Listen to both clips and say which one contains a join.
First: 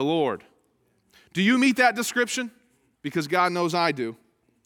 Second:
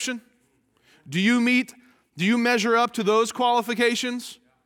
first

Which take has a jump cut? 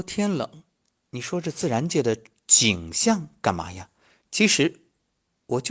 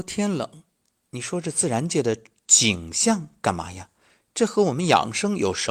first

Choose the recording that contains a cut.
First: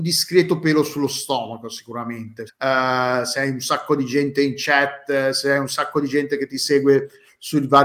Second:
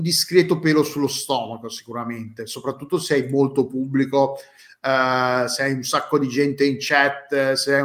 first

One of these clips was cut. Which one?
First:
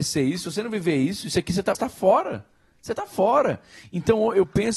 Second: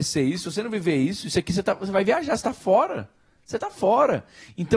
first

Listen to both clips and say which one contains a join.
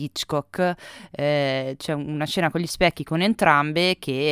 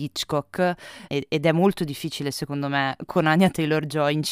second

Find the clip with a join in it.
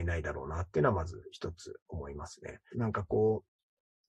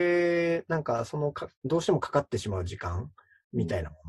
first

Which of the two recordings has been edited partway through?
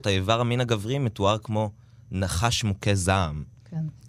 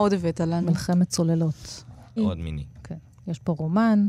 second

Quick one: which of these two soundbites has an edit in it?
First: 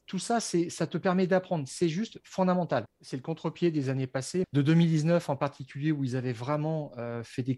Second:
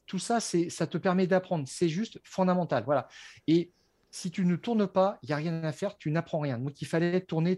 first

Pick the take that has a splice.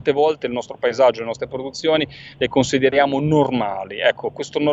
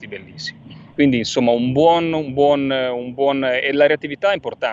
second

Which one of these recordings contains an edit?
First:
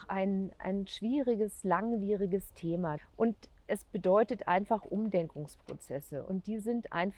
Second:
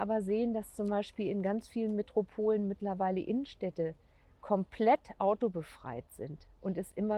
first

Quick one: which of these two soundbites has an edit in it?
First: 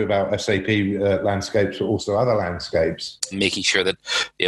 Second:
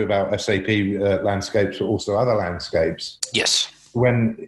first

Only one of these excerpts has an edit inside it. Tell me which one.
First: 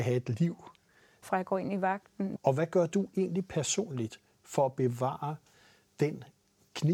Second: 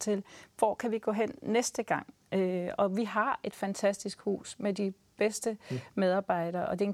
first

